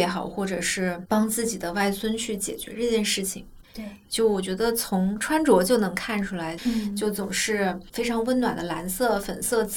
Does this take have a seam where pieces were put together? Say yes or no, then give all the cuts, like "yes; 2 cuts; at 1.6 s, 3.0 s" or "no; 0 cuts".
yes; 2 cuts; at 3.6 s, 6.6 s